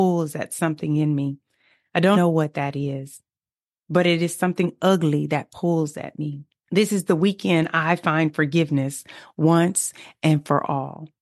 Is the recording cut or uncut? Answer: cut